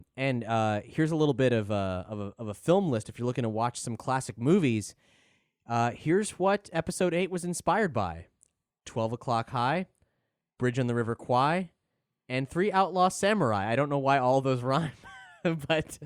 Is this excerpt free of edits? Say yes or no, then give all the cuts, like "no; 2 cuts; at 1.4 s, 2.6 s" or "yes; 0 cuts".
yes; 0 cuts